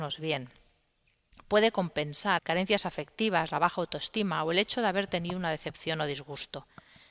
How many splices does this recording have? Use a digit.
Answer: 1